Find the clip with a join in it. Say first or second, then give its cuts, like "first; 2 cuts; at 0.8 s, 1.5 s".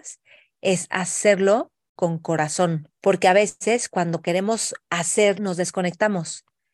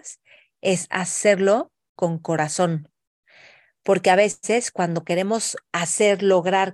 first; 2 cuts; at 2.9 s, 5.3 s